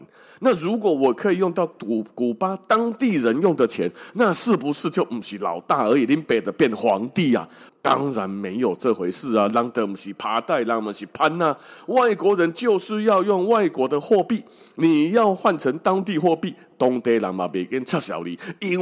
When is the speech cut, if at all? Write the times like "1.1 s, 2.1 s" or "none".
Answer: 7.7 s